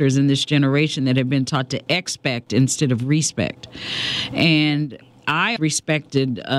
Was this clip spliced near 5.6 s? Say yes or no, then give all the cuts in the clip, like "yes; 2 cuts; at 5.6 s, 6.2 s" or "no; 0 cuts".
yes; 1 cut; at 5.6 s